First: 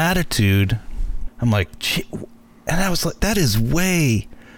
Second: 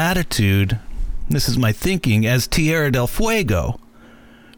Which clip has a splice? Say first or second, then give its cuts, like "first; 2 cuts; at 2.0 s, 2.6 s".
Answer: first; 2 cuts; at 1.3 s, 3.2 s